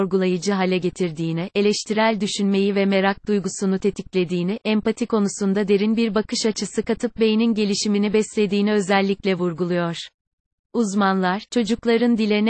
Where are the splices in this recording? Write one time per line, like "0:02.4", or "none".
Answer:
none